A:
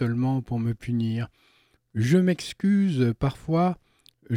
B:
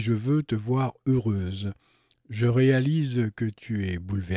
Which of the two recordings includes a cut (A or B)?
A